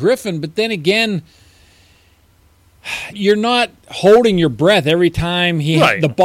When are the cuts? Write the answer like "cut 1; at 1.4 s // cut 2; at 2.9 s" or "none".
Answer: cut 1; at 3.1 s